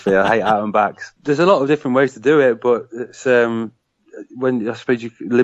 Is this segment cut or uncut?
cut